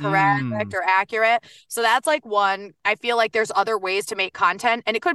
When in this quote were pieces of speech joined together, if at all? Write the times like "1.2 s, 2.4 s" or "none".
none